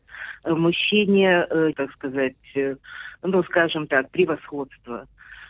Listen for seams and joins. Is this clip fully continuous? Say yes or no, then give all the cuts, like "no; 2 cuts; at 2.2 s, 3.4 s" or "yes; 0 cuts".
no; 1 cut; at 1.7 s